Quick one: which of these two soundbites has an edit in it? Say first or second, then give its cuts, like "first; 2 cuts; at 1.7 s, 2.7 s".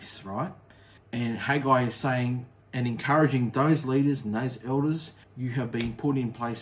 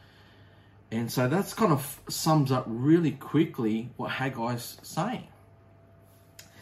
first; 2 cuts; at 1.0 s, 5.2 s